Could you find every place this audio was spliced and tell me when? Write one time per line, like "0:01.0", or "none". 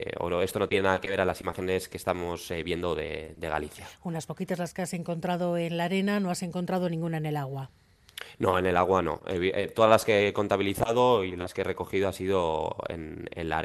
none